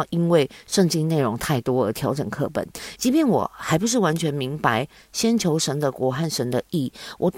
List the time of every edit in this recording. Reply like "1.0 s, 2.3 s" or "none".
3.0 s